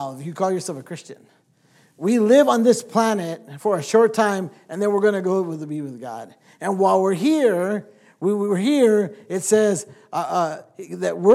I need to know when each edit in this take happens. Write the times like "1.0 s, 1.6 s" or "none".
none